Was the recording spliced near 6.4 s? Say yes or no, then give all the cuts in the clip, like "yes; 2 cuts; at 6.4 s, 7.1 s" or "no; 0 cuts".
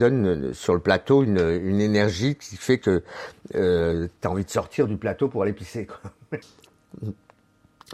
yes; 1 cut; at 6.4 s